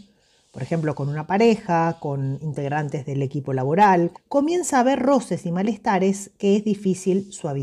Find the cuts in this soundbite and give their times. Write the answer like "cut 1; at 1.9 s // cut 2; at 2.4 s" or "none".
cut 1; at 4.1 s